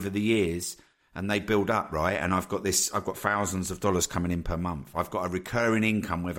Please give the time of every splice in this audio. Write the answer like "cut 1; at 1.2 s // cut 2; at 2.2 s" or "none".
none